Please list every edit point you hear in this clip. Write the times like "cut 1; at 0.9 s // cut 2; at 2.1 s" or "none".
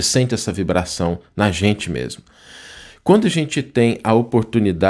none